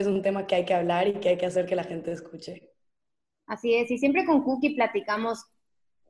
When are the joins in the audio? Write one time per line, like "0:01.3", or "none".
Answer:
none